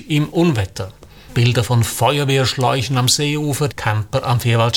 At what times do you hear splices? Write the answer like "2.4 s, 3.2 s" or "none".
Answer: 1.3 s, 3.7 s